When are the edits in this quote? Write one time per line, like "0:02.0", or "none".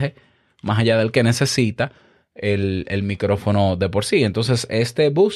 none